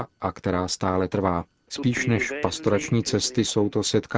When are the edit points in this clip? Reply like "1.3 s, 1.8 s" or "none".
1.7 s